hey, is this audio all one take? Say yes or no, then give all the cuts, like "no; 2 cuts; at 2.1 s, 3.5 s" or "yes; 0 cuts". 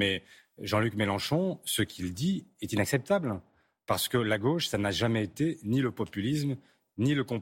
yes; 0 cuts